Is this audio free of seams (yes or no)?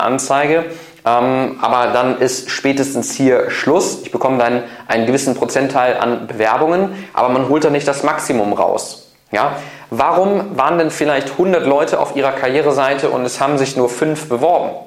yes